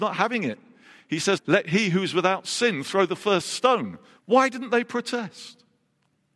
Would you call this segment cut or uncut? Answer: cut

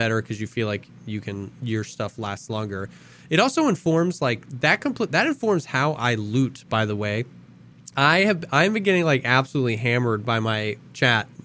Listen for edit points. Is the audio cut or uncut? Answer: cut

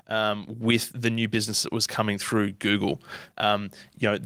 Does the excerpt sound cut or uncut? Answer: cut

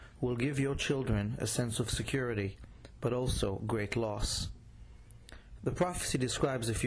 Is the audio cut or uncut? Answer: cut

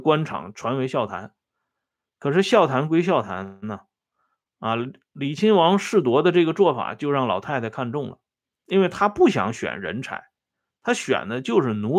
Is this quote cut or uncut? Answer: uncut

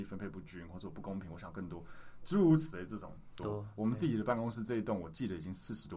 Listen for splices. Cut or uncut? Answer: cut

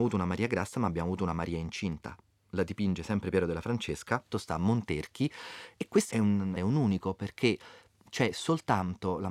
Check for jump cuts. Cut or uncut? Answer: cut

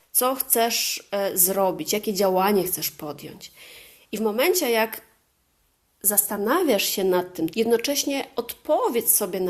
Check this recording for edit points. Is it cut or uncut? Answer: cut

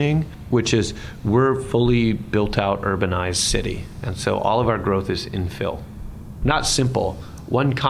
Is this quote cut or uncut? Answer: cut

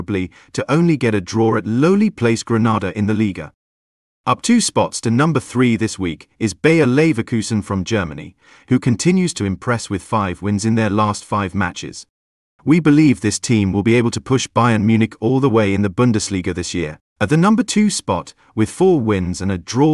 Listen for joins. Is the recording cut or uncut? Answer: cut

